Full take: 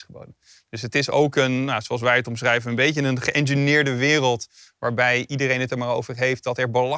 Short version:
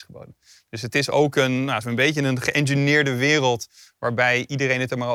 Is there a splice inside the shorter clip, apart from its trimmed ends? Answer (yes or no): yes